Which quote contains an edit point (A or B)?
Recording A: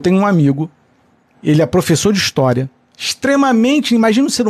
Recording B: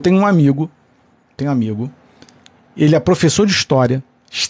A